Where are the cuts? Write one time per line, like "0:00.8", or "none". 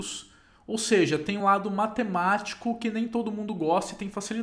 0:01.4